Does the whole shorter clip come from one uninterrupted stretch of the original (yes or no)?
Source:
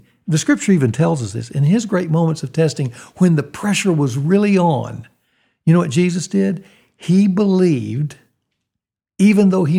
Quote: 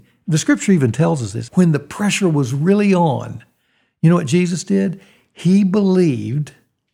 no